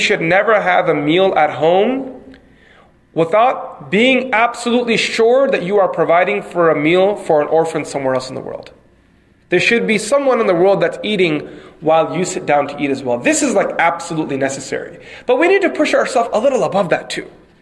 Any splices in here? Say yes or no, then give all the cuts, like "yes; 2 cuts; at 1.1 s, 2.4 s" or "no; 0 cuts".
no; 0 cuts